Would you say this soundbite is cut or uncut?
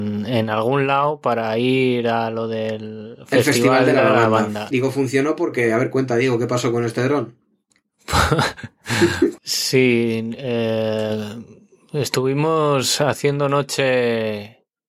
cut